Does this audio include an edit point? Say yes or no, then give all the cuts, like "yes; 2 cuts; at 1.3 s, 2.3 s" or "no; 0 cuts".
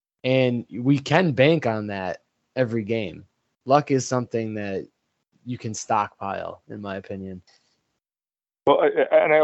yes; 1 cut; at 5.3 s